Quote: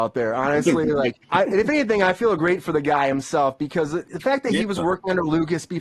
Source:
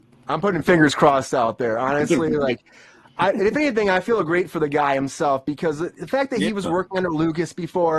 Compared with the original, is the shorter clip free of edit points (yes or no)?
no